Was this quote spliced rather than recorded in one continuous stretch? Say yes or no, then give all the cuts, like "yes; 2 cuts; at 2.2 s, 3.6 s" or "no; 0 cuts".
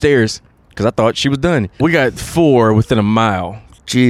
yes; 1 cut; at 1.8 s